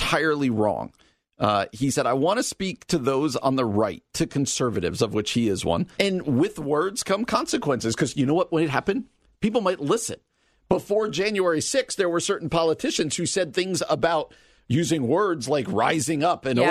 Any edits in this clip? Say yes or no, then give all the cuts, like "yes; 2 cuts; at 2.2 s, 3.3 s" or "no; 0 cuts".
yes; 1 cut; at 6.0 s